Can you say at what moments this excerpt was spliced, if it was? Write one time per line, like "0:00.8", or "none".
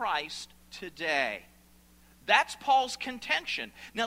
none